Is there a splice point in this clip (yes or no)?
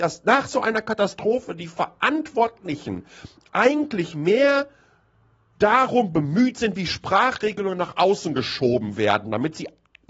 no